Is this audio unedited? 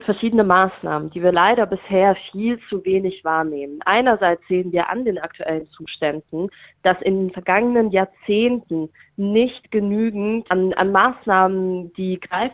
yes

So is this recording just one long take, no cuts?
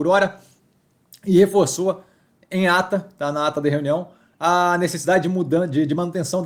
yes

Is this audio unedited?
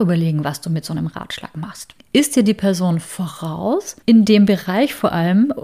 no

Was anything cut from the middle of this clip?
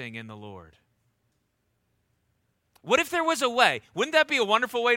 no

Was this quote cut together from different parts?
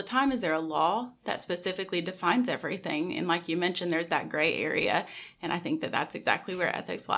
no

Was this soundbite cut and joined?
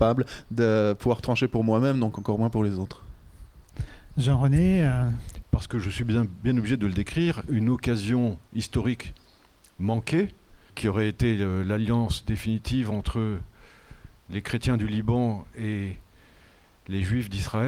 yes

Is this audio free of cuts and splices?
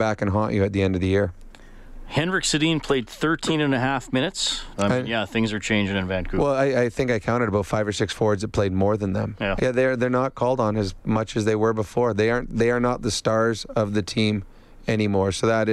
no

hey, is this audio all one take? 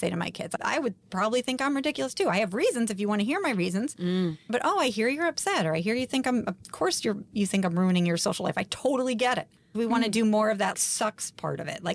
no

